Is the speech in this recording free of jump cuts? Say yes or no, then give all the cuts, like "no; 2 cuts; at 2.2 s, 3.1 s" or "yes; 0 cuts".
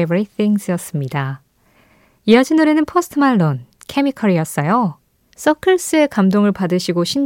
no; 1 cut; at 5.3 s